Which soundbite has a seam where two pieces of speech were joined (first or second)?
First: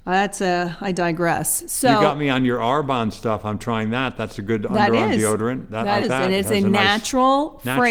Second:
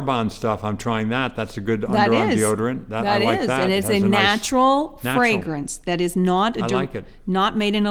first